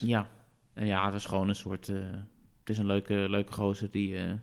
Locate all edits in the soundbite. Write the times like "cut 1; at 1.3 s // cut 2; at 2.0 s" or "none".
none